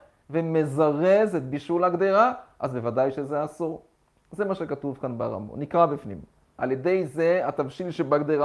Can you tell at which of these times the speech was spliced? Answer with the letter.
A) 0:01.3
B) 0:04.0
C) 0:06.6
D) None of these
C